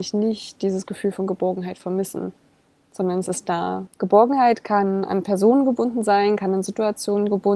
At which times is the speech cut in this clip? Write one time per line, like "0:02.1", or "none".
0:03.9